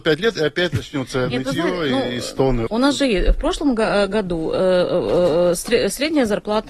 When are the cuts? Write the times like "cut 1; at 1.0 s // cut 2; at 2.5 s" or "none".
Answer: cut 1; at 2.7 s

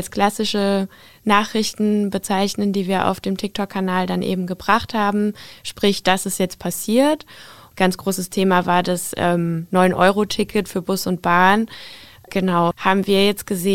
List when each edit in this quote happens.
cut 1; at 7.7 s // cut 2; at 12.7 s

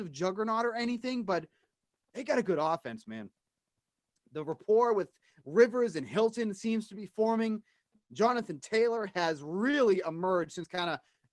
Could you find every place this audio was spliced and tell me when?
none

